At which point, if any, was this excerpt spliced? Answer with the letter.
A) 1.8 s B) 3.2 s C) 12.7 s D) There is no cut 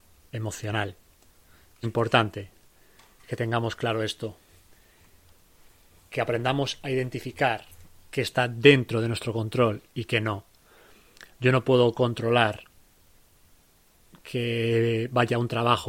A